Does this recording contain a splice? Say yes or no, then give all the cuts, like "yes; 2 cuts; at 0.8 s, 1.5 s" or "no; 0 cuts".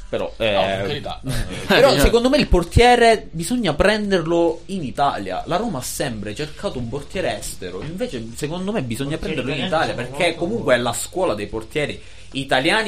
yes; 1 cut; at 1.7 s